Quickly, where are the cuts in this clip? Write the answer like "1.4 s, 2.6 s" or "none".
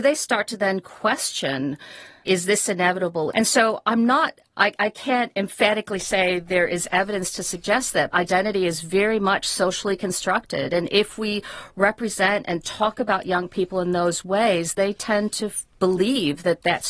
2.2 s, 3.3 s, 8.1 s